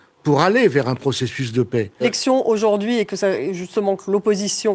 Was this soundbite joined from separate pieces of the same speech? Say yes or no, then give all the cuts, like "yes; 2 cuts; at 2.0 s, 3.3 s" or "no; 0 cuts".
yes; 1 cut; at 2.0 s